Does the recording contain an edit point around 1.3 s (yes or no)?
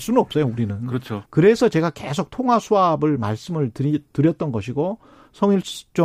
yes